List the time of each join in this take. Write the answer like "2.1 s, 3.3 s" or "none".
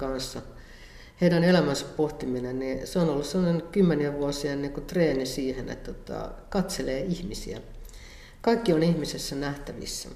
none